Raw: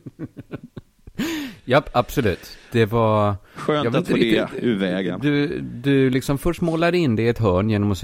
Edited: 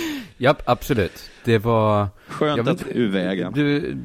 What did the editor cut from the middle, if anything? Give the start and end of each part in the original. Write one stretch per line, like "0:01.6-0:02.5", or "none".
0:04.1-0:04.5